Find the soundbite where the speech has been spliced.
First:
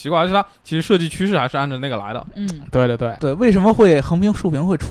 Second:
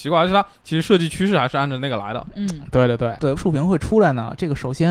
second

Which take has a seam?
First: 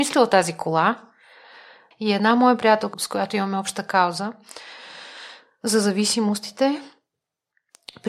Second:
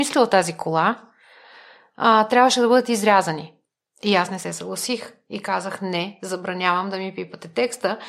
first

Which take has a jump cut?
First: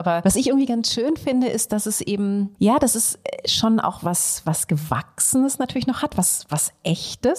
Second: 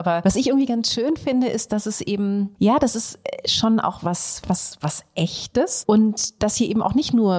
second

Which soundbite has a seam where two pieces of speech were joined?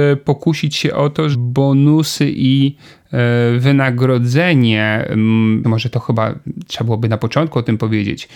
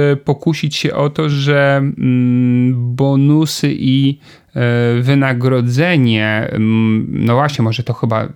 first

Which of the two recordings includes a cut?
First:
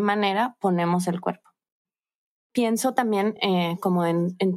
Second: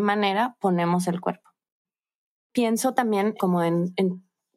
second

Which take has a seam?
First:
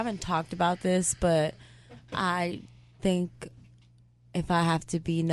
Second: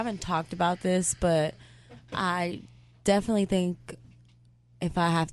first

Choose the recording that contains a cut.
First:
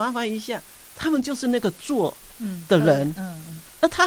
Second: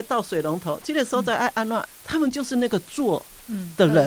second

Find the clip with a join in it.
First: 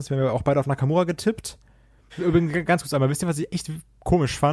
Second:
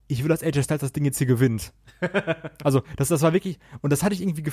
first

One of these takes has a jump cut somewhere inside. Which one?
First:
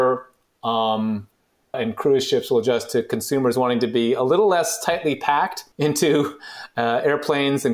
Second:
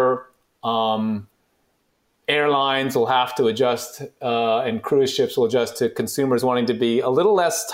first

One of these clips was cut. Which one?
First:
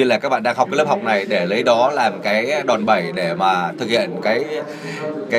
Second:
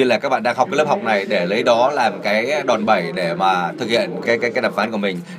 second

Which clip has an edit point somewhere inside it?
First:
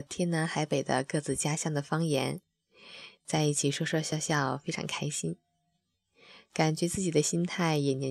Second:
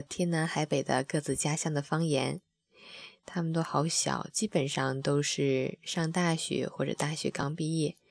second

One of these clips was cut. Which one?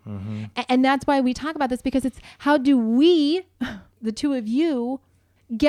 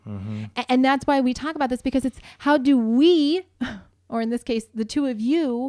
first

